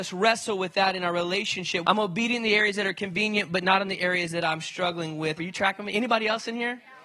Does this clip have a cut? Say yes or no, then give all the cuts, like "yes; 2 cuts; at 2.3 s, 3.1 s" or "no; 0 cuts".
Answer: yes; 2 cuts; at 1.8 s, 5.4 s